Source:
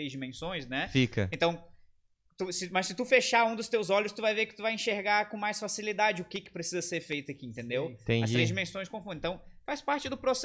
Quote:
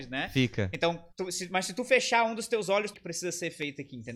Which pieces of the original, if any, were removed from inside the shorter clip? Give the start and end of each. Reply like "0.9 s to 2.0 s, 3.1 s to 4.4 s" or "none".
1.7 s to 2.3 s, 4.1 s to 6.4 s